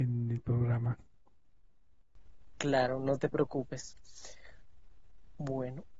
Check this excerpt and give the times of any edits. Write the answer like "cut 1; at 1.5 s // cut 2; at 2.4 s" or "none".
none

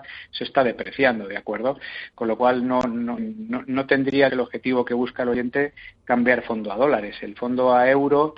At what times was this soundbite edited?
cut 1; at 3.2 s // cut 2; at 4.3 s

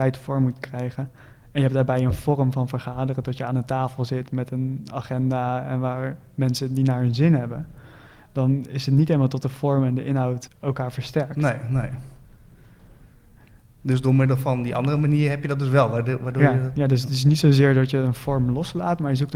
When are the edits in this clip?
cut 1; at 10.5 s

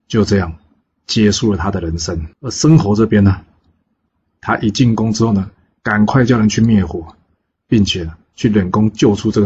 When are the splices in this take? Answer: cut 1; at 2.3 s

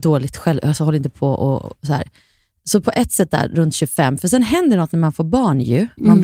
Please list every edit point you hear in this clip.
none

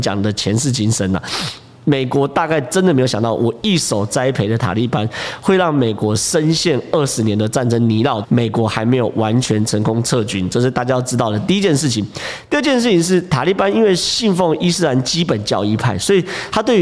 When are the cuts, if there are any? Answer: cut 1; at 8.2 s

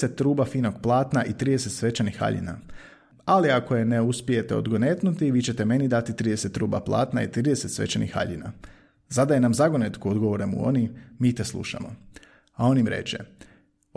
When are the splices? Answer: none

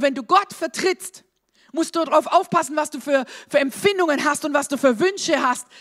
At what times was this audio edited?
cut 1; at 1.7 s

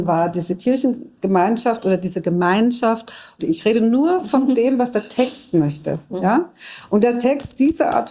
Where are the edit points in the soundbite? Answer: cut 1; at 3.4 s

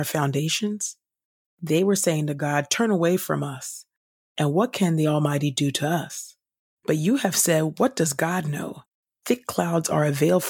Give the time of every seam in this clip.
cut 1; at 6.7 s // cut 2; at 9.1 s

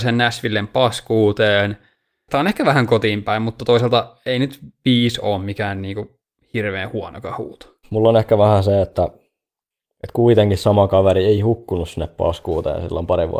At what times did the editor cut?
cut 1; at 7.8 s

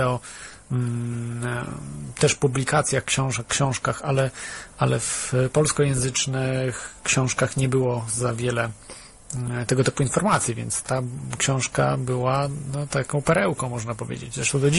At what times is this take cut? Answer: cut 1; at 10.8 s

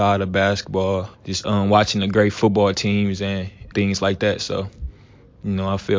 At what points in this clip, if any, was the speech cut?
cut 1; at 1.1 s // cut 2; at 3.7 s

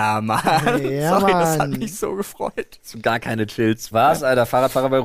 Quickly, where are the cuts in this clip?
cut 1; at 3.9 s

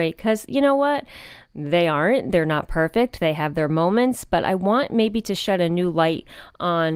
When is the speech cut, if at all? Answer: none

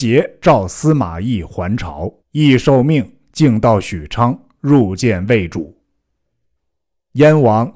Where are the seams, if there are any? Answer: cut 1; at 2.2 s // cut 2; at 6.6 s

